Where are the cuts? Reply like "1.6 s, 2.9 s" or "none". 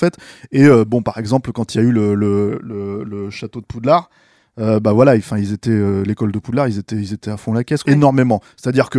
7.8 s